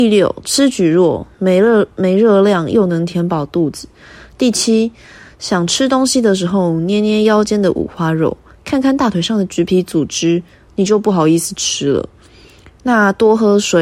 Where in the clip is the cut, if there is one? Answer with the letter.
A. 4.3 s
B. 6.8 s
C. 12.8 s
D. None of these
C